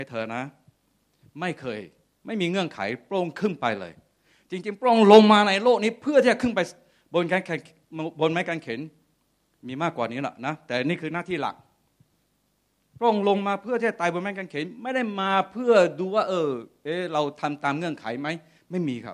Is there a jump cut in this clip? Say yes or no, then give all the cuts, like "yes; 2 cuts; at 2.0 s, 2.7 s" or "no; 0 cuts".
no; 0 cuts